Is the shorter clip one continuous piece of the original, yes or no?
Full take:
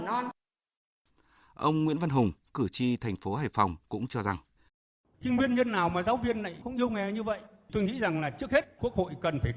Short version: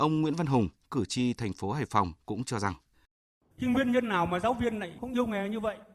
yes